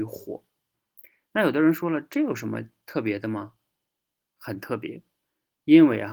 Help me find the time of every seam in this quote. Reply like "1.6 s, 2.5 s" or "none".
none